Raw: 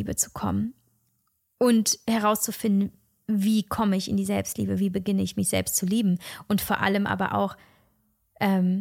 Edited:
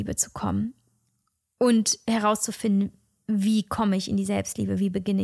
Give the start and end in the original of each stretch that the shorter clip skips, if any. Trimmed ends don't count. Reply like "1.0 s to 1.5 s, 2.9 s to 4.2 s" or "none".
none